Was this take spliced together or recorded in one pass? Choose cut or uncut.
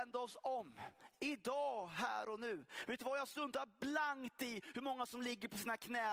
uncut